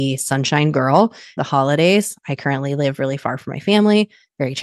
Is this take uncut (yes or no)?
no